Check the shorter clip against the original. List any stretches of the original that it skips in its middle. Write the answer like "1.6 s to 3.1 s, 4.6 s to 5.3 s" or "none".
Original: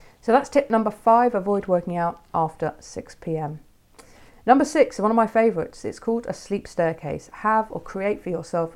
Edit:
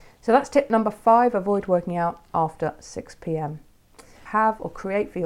4.3 s to 7.4 s